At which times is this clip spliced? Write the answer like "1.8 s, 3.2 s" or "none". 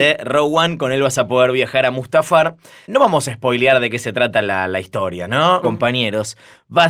2.8 s, 5.6 s